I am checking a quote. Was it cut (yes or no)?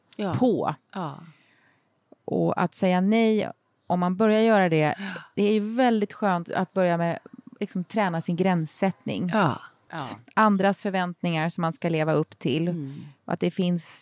yes